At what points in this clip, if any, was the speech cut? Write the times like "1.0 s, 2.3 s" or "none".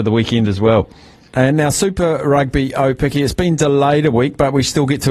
1.3 s